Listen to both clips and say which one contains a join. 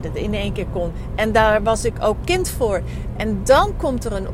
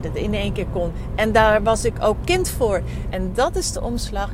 second; 1 cut; at 3.1 s

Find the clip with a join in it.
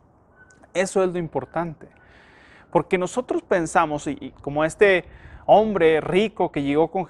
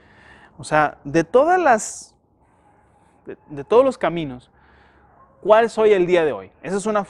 first; 1 cut; at 4.4 s

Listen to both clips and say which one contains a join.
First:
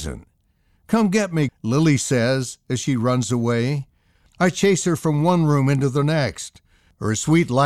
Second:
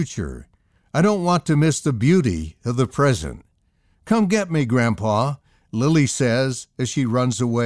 first; 1 cut; at 1.5 s

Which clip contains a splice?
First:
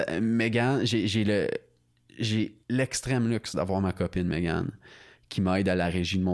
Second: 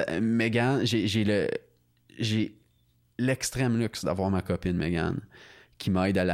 first; 1 cut; at 2.6 s

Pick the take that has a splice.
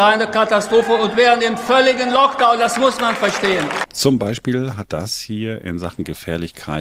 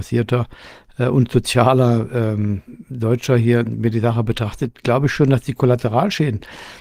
first; 2 cuts; at 3.8 s, 4.9 s

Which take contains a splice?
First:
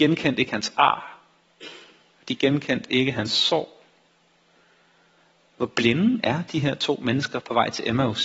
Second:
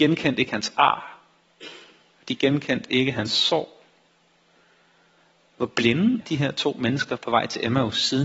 second; 1 cut; at 6.2 s

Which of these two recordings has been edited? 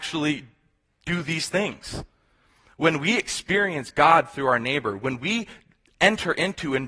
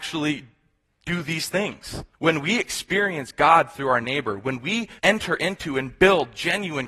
second; 2 cuts; at 2.1 s, 5.0 s

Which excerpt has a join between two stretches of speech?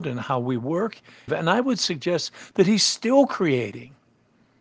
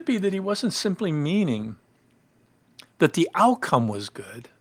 first; 1 cut; at 1.3 s

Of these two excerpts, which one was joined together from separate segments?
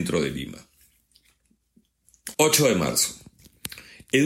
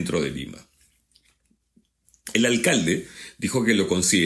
first; 1 cut; at 2.3 s

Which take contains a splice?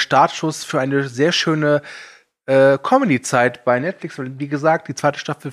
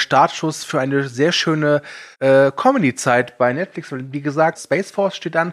second; 2 cuts; at 2.1 s, 4.6 s

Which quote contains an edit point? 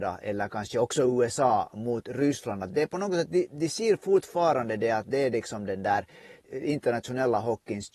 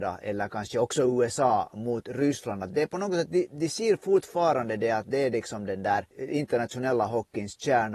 second; 1 cut; at 6.1 s

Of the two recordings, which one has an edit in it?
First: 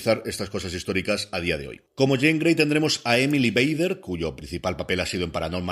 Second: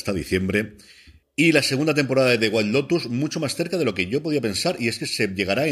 first; 1 cut; at 1.9 s

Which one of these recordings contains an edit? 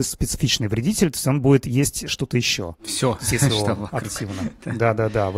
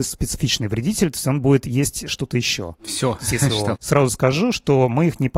second; 1 cut; at 3.8 s

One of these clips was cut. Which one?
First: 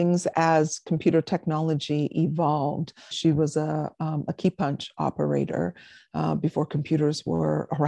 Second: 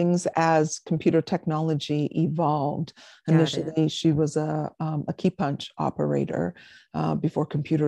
first; 1 cut; at 3.1 s

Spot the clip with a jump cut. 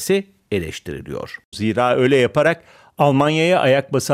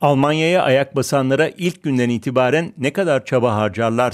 first; 1 cut; at 1.5 s

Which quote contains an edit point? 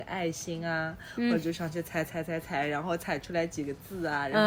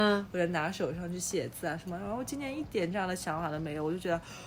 first; 1 cut; at 2.0 s

